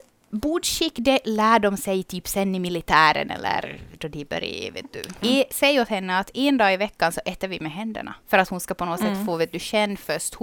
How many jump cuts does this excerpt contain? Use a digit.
2